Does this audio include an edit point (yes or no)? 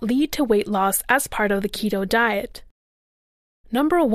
no